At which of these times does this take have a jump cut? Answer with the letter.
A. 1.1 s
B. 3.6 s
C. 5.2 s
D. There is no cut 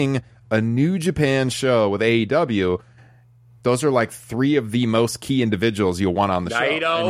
B